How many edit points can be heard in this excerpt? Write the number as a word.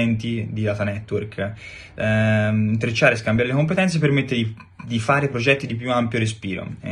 zero